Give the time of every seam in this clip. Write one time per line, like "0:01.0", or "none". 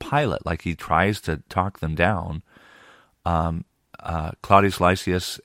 none